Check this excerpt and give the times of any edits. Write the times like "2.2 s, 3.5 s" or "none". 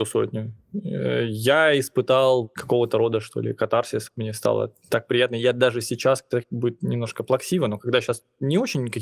none